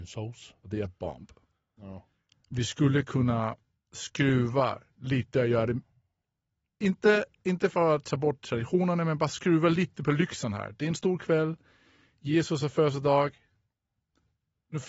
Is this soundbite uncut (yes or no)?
no